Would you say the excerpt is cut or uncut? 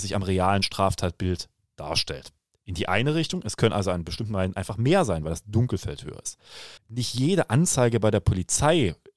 cut